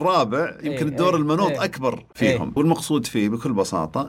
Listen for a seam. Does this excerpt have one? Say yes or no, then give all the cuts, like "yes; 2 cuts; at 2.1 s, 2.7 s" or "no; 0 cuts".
yes; 1 cut; at 2.6 s